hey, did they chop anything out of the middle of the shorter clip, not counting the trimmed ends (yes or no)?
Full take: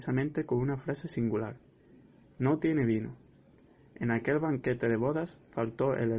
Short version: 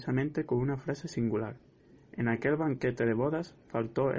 yes